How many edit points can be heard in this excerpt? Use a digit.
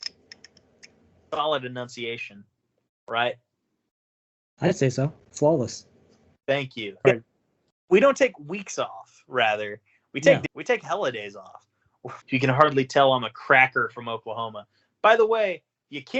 3